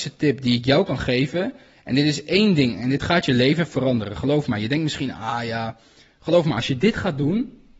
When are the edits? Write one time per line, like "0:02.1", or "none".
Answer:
none